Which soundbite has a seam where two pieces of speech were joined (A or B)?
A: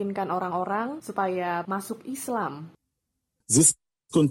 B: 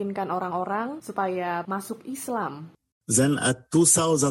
B